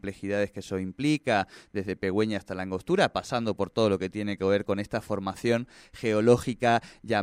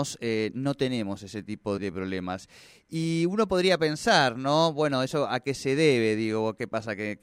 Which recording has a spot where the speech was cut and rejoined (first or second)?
second